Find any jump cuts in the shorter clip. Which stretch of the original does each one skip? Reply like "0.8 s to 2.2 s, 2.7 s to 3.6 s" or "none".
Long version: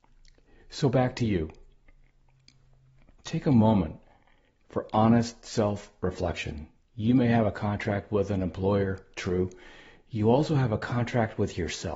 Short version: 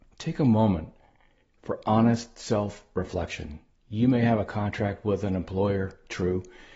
none